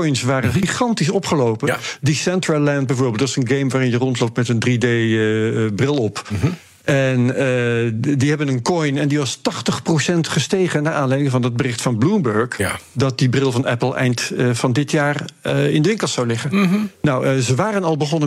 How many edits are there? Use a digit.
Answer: 0